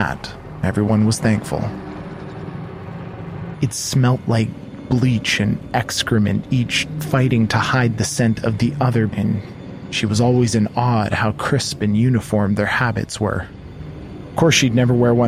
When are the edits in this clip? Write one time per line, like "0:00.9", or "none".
0:03.5
0:09.1